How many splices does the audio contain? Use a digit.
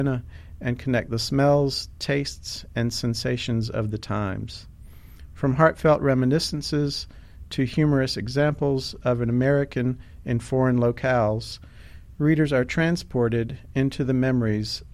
0